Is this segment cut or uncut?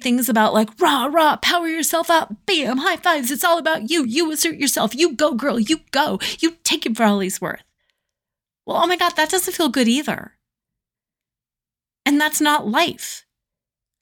uncut